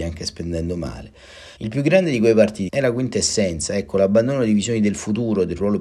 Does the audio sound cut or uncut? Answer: cut